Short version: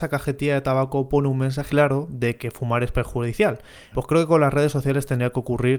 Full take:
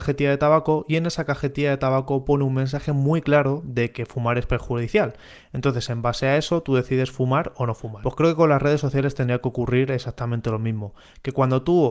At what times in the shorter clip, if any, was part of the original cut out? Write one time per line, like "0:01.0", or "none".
0:01.7
0:03.9